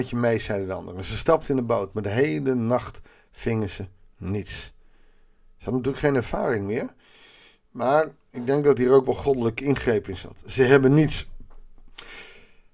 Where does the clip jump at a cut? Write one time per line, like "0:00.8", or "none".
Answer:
none